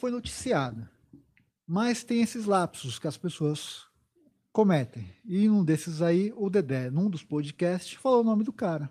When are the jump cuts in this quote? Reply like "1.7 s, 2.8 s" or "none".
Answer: none